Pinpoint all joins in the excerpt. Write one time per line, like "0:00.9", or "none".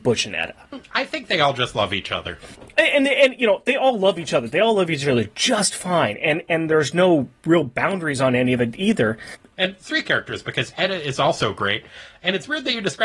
0:09.5